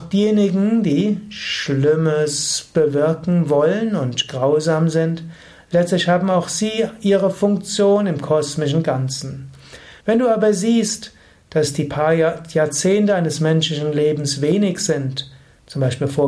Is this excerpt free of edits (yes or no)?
no